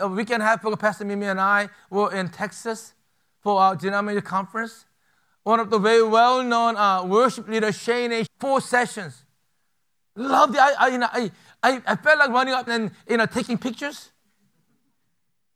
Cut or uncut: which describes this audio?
cut